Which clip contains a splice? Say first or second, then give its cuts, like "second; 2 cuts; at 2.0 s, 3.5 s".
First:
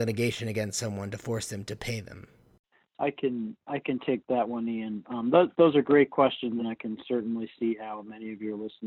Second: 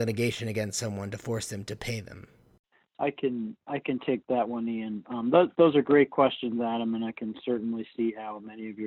first; 1 cut; at 6.6 s